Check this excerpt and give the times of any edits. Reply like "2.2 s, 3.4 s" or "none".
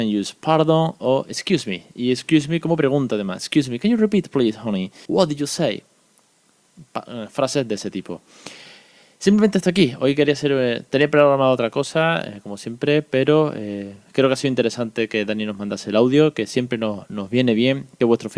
5.1 s